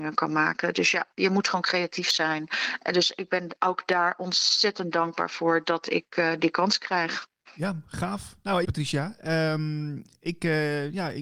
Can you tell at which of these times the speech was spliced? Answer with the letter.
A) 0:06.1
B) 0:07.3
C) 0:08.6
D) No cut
C